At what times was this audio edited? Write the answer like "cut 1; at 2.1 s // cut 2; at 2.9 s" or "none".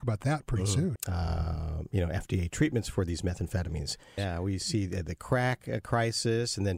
cut 1; at 1.0 s // cut 2; at 4.2 s